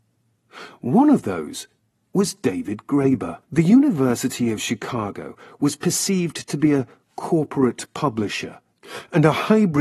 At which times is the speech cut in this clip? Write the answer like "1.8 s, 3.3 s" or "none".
1.9 s, 3.4 s